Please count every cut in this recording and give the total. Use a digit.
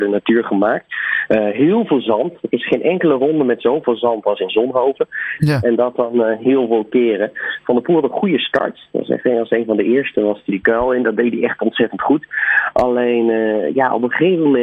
2